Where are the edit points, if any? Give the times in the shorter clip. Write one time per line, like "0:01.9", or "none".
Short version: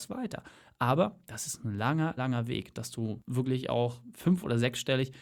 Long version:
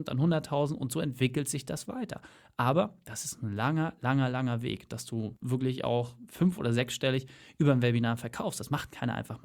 0:02.2